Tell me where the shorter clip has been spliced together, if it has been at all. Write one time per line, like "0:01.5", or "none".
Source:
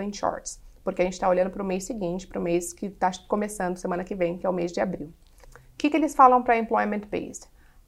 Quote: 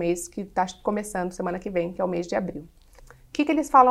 none